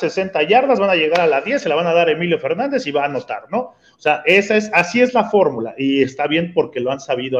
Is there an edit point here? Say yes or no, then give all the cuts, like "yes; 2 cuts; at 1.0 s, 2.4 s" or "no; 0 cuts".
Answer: no; 0 cuts